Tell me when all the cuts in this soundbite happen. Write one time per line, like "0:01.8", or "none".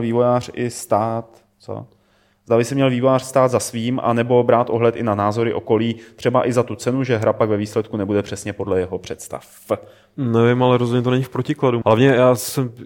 0:10.1
0:11.8